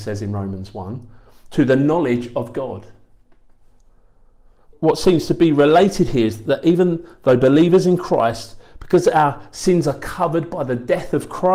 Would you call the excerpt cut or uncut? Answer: cut